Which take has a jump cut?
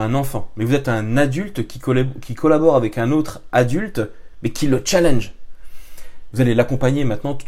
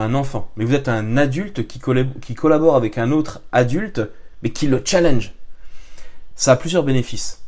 first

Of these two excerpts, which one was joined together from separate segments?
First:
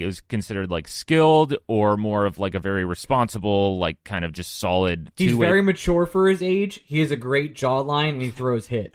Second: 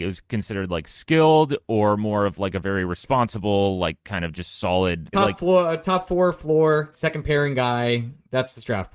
second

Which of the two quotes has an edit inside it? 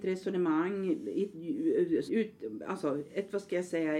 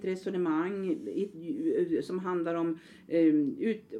first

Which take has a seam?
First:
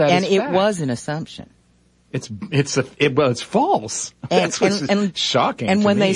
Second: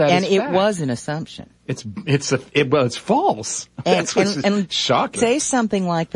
second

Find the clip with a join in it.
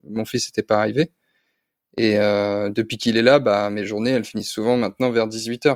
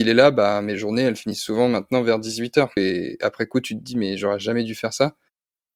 second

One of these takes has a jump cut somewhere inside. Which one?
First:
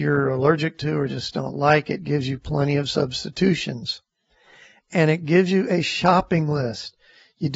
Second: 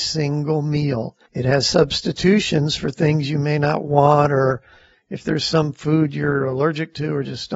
second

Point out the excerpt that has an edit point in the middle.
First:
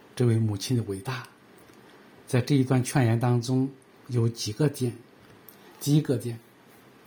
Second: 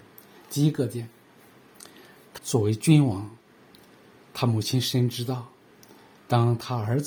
second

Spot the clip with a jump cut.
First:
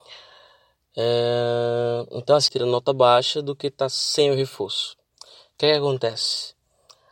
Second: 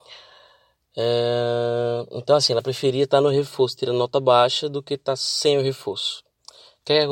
first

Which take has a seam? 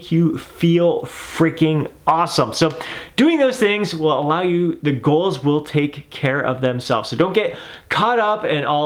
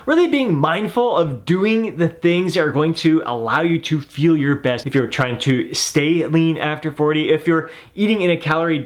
second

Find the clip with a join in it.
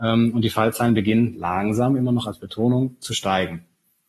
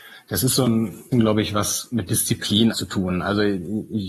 second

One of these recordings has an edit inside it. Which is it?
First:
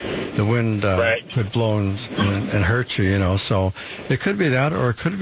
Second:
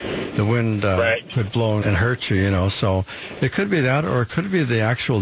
second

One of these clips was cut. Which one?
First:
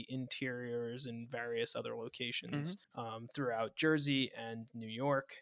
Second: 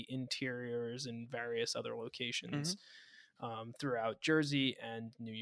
first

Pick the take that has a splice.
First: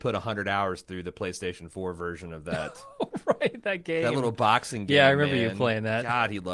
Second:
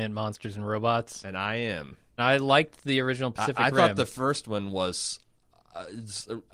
second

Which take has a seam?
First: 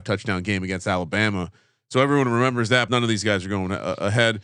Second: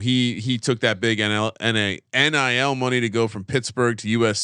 first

